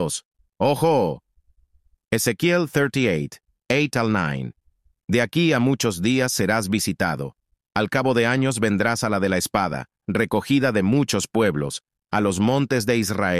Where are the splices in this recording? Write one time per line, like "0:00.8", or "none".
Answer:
none